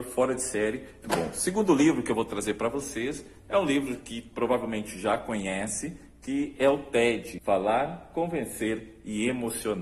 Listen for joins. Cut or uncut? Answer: cut